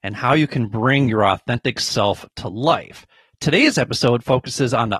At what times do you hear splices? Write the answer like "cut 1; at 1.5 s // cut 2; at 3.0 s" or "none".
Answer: none